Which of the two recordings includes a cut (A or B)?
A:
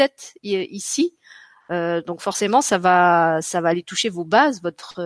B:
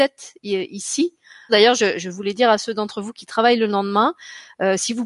B